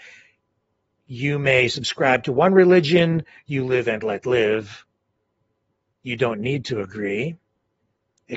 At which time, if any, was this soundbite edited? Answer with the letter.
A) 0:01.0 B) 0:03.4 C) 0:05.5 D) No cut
B